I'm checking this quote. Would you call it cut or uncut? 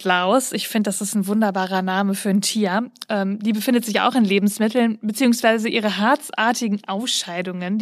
uncut